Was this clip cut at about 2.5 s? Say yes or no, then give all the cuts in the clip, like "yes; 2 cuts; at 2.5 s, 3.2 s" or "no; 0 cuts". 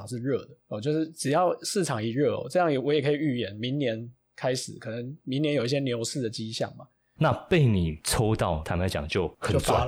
no; 2 cuts; at 7.2 s, 8.6 s